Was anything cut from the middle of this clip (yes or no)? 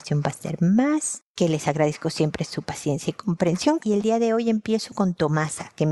yes